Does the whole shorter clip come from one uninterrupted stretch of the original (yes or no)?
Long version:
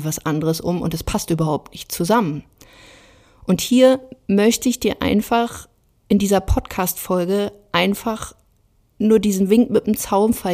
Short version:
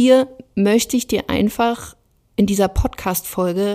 yes